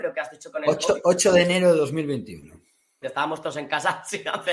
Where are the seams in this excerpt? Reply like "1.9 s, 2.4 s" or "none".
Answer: 3.0 s